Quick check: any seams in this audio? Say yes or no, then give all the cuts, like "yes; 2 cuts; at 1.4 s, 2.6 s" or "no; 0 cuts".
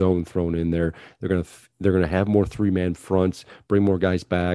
no; 0 cuts